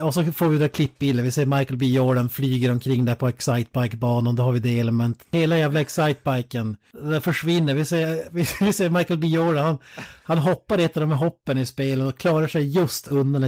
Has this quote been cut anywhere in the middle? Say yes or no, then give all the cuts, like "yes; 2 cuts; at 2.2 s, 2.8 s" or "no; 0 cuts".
yes; 1 cut; at 5.2 s